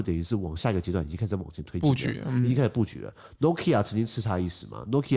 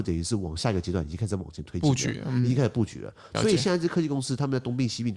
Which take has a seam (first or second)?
second